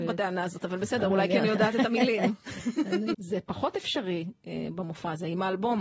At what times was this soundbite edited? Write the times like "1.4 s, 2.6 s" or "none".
3.1 s